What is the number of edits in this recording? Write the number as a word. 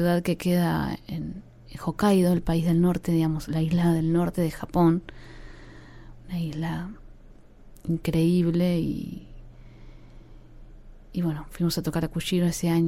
zero